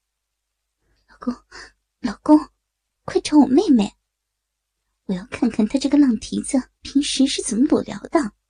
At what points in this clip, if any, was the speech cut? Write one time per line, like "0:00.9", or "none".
0:03.0
0:06.8